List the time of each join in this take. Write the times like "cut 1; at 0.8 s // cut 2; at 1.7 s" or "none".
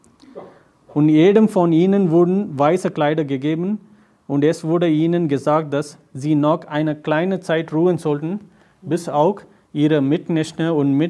none

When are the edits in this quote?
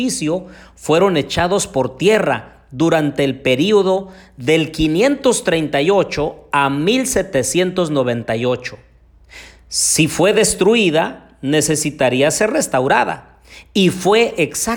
none

